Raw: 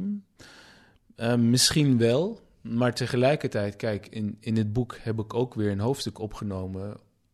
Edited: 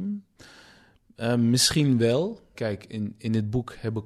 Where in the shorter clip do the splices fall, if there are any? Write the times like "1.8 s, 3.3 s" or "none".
2.5 s